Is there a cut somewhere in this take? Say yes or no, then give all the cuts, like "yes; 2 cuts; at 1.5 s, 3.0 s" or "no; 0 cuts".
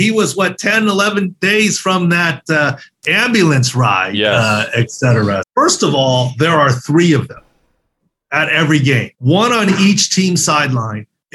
yes; 2 cuts; at 5.4 s, 9.1 s